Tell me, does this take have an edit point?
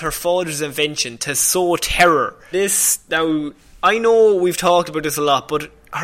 yes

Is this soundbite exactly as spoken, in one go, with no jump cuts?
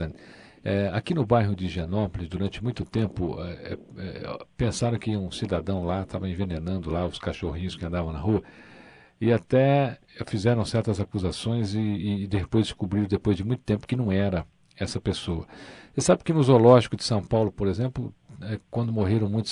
yes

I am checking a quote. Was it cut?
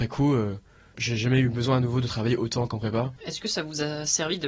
yes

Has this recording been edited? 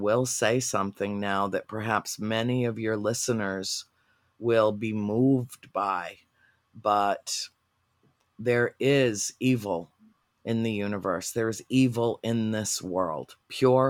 no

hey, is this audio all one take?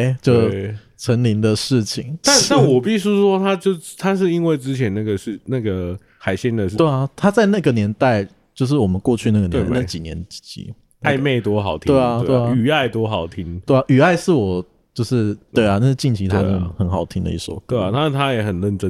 no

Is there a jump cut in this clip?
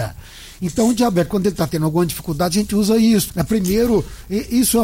yes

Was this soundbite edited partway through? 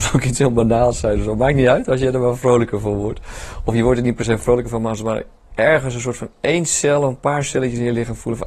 no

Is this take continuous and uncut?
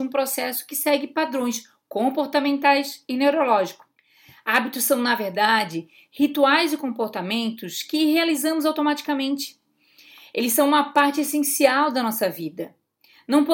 yes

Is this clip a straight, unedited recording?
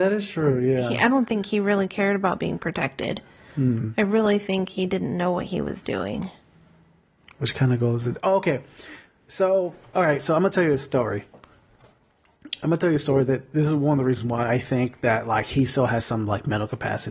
yes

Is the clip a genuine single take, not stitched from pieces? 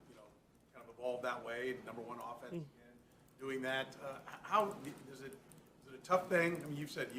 yes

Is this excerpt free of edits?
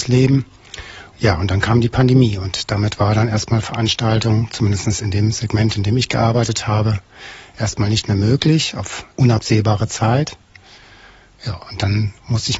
no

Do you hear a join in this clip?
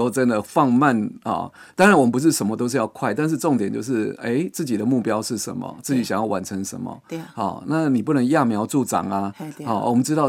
no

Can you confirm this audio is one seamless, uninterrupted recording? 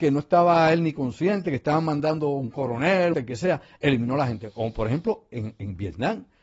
no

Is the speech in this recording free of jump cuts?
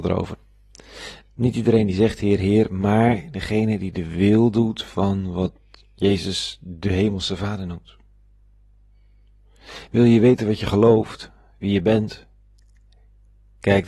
yes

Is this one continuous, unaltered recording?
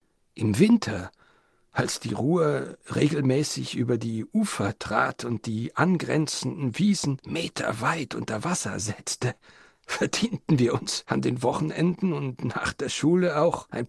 yes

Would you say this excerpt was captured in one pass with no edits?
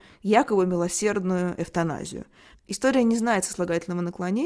no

